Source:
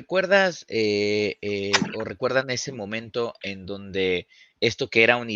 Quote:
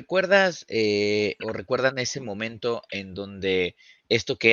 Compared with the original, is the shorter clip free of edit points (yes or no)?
no